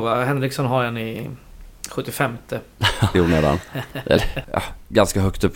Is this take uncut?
no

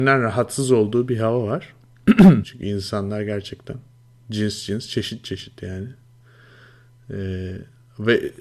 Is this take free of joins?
no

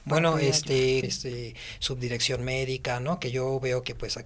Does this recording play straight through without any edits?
no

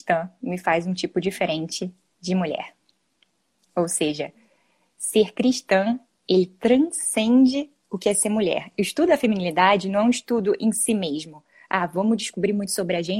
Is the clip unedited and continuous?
yes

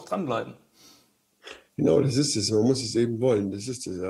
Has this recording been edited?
no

